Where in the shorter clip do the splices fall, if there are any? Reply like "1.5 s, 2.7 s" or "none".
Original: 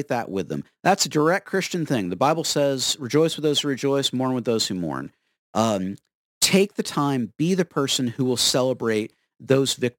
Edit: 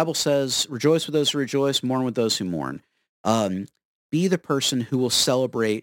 4.1 s